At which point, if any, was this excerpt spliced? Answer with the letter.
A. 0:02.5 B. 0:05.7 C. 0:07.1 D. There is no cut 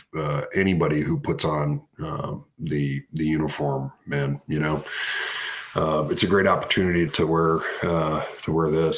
C